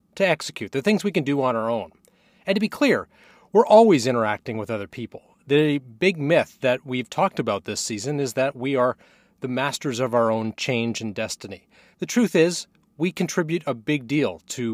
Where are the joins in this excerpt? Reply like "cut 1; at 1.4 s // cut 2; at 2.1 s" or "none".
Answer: none